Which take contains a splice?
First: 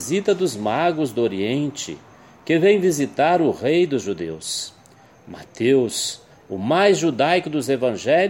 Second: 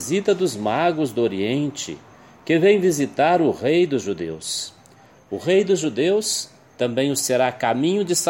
second; 1 cut; at 5.2 s

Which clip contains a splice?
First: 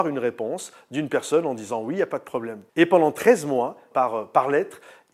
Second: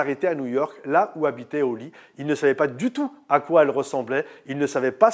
first; 2 cuts; at 2.7 s, 3.9 s

